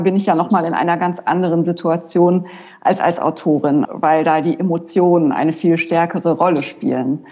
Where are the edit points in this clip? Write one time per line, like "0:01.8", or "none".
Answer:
0:03.8